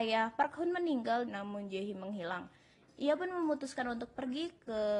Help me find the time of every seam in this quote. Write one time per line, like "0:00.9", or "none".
0:01.2
0:02.7